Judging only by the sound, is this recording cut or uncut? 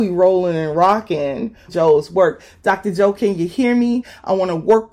cut